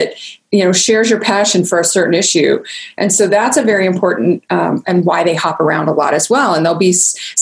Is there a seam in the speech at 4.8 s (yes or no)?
yes